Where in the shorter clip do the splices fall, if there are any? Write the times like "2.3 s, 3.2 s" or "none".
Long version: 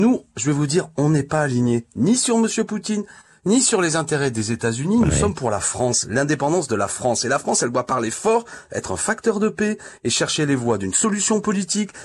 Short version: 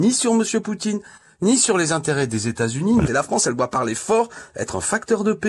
3.1 s